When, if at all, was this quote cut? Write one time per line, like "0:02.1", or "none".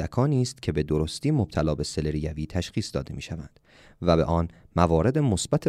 none